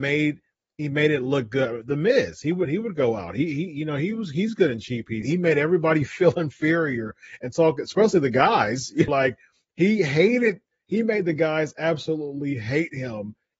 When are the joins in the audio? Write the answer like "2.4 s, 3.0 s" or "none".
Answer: 5.2 s, 9.1 s

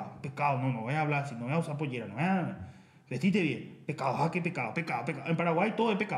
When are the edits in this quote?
none

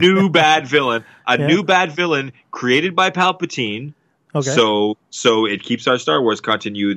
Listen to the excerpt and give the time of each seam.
none

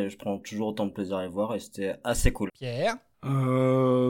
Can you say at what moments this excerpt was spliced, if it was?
2.5 s

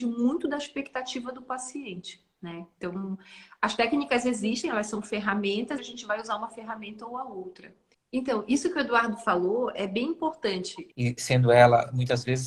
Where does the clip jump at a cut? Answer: 5.8 s, 7.9 s, 10.9 s

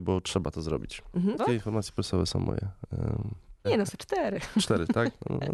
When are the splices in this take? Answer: 1.4 s, 3.6 s

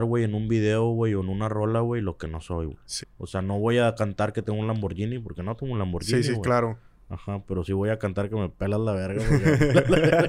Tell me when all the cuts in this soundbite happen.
3.0 s

